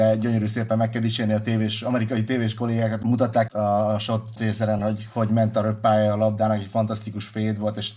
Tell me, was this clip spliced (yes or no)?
no